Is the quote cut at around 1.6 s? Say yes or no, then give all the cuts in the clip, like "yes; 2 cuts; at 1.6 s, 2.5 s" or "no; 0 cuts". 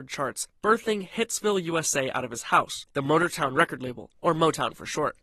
no; 1 cut; at 2.9 s